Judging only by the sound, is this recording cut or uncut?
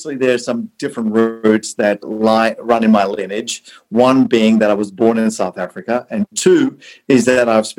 cut